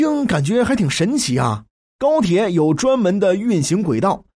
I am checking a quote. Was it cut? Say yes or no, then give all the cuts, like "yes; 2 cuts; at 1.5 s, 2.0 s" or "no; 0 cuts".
yes; 1 cut; at 1.9 s